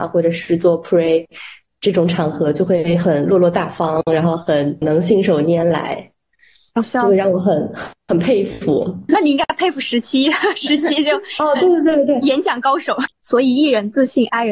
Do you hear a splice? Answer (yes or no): yes